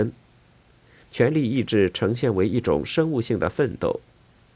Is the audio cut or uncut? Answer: cut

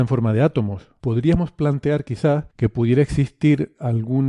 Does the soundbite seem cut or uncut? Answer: cut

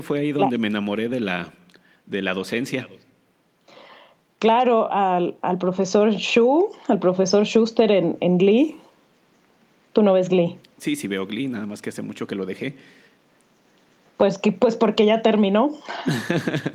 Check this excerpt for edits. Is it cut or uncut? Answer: uncut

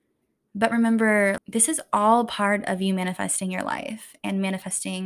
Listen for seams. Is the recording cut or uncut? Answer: cut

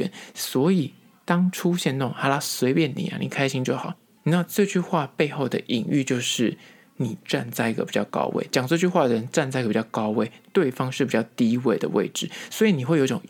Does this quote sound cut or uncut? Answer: cut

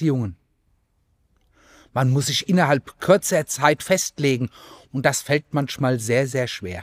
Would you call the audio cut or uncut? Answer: uncut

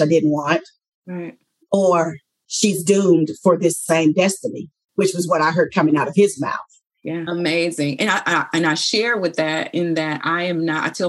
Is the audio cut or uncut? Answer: cut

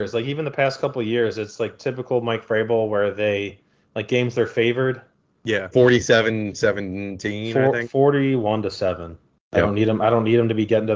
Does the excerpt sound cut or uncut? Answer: cut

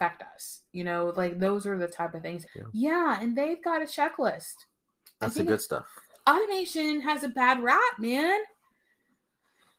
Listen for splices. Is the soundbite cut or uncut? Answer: cut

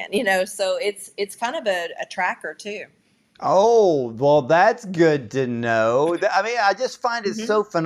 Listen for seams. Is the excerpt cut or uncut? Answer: uncut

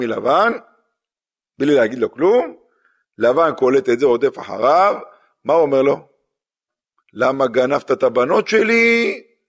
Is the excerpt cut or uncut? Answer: uncut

